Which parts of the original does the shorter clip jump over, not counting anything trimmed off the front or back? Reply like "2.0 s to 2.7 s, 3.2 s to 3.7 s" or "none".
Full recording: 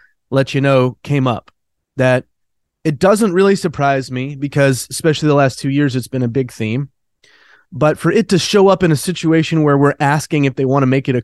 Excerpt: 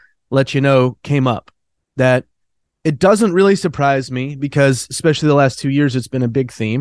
none